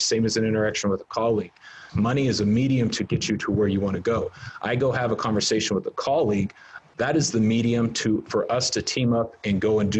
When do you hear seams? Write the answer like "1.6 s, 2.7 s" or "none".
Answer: 1.9 s